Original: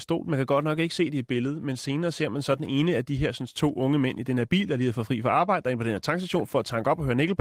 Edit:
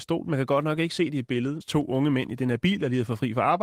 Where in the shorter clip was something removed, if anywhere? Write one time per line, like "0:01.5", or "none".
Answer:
0:01.6